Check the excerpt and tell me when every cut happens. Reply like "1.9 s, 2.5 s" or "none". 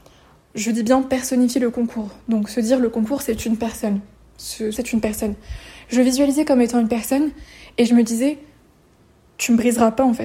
4.7 s